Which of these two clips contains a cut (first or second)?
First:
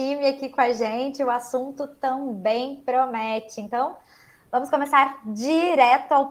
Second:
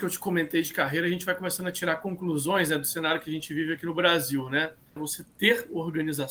second